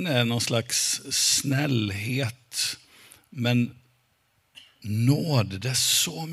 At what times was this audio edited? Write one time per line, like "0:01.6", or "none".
none

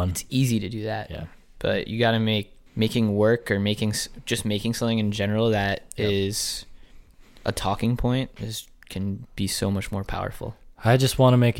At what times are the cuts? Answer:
0:02.7

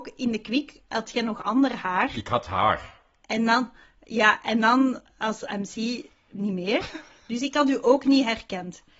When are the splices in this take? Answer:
none

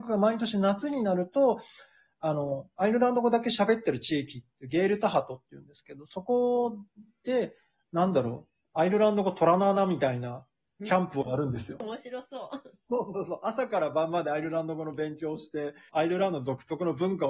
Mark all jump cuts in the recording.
0:15.9

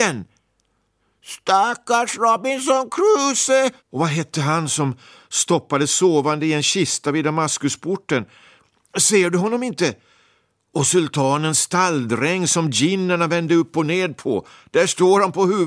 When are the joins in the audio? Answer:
0:03.8

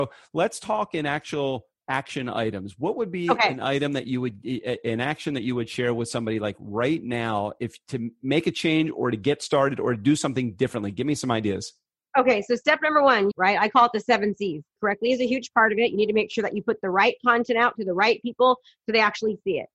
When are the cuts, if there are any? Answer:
0:13.3
0:14.8

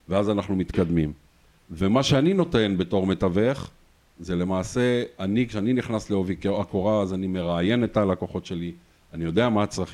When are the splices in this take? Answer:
0:01.6

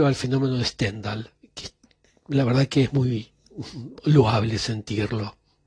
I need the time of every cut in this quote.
none

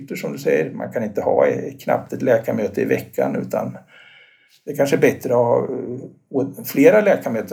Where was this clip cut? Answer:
none

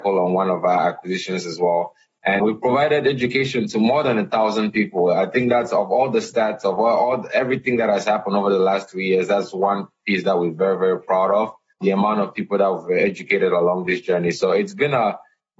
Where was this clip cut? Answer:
0:02.4

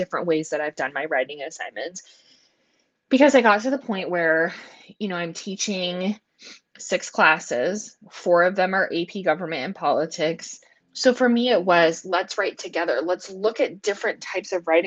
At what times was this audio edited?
0:10.8

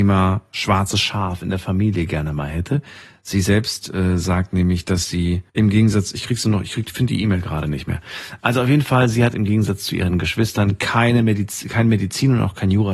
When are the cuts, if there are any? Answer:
0:05.5

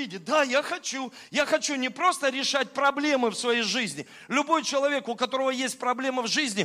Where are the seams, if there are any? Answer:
none

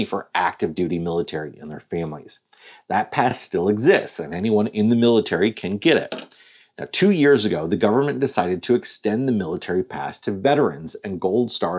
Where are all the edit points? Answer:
none

